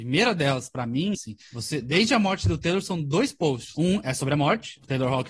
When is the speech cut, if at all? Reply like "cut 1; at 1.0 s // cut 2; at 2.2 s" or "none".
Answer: cut 1; at 1.1 s